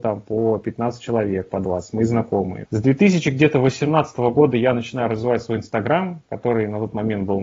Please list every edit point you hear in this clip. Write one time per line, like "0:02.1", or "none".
0:02.7